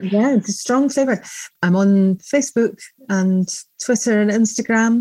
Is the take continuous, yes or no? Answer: no